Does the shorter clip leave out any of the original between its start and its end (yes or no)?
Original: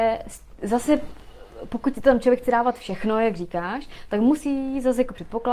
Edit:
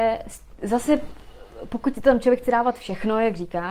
no